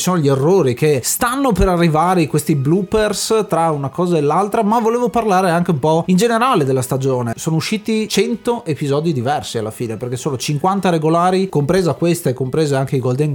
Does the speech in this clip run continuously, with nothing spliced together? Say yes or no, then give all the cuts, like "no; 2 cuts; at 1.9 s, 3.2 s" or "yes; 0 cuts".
no; 2 cuts; at 7.3 s, 11.5 s